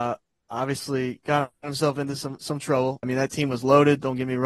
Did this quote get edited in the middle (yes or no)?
yes